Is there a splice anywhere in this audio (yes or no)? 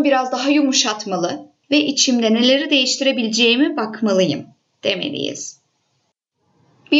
no